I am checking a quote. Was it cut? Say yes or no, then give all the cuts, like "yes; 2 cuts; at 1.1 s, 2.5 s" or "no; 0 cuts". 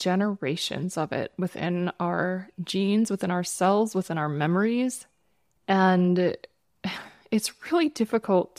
no; 0 cuts